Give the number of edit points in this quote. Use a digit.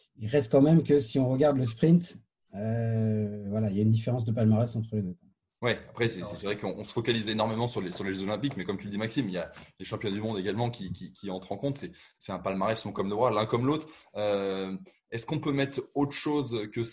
0